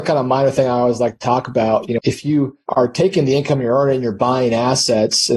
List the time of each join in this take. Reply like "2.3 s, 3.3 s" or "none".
2.0 s